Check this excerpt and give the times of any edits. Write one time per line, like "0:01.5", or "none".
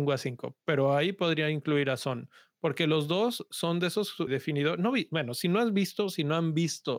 0:04.3